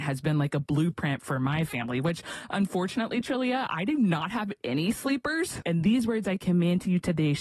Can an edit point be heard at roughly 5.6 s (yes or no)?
yes